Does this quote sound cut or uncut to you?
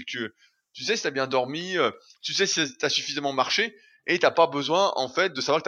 uncut